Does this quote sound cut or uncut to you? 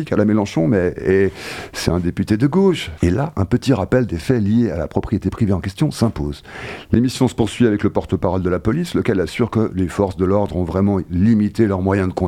cut